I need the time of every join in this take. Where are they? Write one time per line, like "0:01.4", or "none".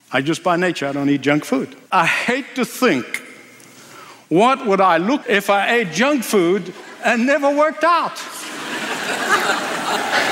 0:01.8
0:05.2